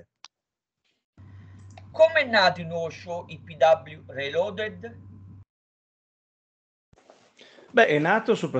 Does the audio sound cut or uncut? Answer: cut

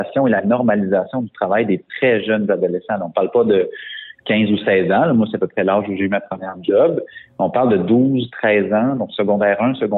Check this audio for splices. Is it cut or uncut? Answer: uncut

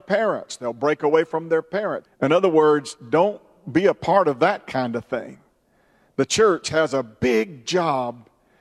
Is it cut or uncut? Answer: cut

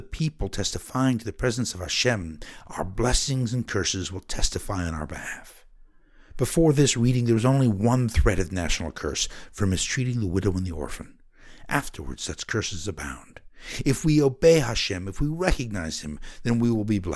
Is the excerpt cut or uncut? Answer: uncut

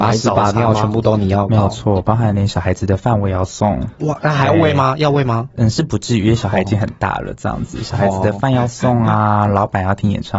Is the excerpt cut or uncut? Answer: uncut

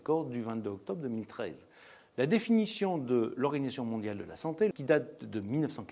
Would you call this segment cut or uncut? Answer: cut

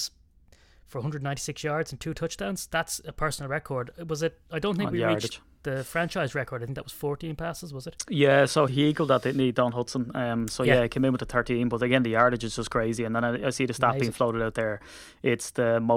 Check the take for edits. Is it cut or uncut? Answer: cut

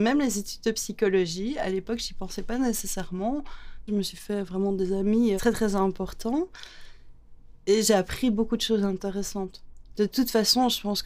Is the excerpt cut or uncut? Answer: cut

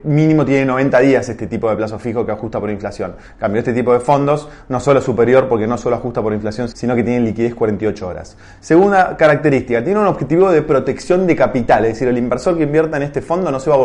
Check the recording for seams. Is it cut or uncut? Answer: cut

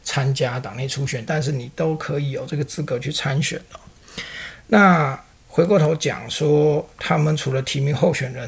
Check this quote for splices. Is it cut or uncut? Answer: cut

